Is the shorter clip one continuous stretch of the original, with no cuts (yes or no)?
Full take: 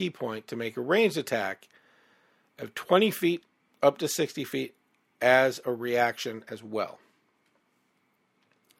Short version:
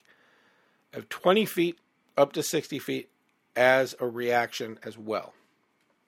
yes